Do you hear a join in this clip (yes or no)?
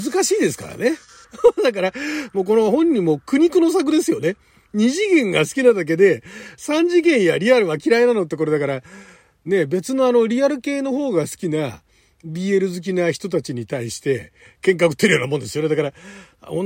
yes